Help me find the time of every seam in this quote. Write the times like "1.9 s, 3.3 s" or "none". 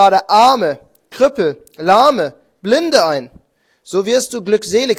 none